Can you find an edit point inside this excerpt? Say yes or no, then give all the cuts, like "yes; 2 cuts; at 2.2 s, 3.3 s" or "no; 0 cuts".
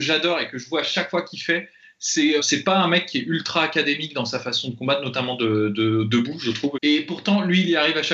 yes; 2 cuts; at 2.4 s, 6.7 s